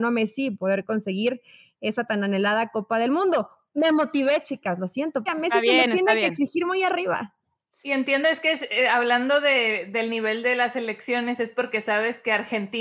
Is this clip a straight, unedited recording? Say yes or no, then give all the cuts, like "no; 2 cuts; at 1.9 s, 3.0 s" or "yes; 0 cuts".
no; 1 cut; at 5.3 s